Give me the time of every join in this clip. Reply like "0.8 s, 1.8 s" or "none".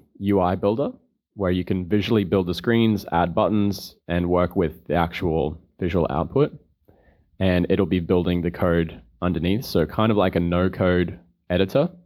none